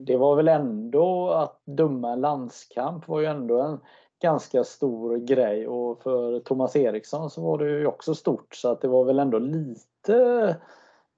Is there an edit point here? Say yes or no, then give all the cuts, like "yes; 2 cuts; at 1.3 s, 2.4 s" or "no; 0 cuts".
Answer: no; 0 cuts